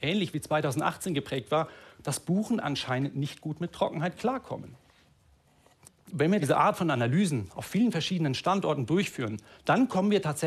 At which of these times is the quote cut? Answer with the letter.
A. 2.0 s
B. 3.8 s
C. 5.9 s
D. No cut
A